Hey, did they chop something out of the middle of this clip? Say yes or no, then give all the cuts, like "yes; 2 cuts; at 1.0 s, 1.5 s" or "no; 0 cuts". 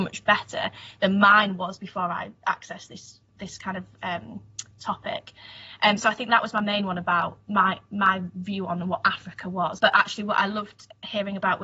yes; 1 cut; at 9.8 s